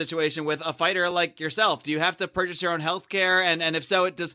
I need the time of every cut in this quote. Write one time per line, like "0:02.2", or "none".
none